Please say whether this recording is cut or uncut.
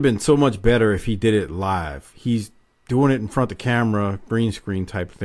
cut